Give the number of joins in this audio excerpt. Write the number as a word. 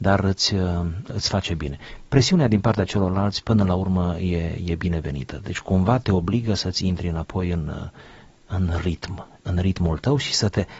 zero